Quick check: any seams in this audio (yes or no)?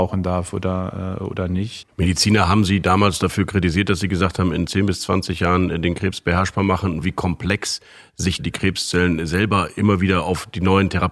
yes